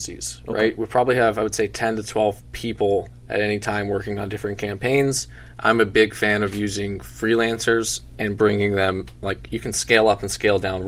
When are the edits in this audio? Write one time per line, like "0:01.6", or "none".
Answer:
none